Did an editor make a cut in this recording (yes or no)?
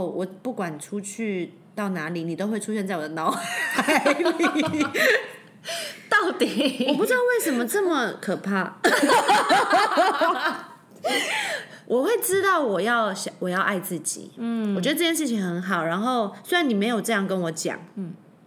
no